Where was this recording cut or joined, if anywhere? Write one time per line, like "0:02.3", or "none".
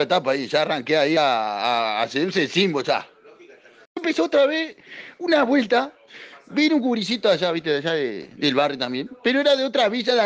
none